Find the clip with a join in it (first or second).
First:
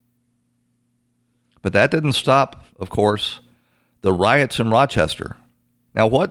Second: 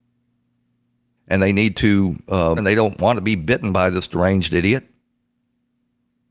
second